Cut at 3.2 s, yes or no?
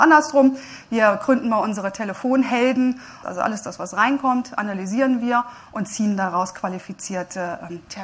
yes